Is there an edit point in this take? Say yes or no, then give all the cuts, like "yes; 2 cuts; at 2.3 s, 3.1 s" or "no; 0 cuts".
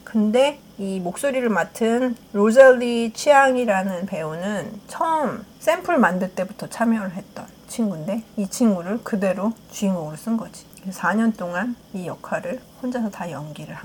no; 0 cuts